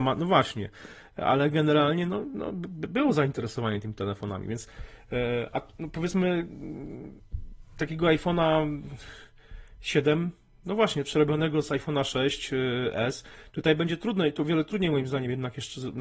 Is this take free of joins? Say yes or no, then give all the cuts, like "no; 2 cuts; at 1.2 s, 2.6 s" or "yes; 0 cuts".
yes; 0 cuts